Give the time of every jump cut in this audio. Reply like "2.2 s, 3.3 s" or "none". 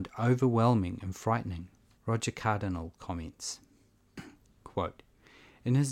2.0 s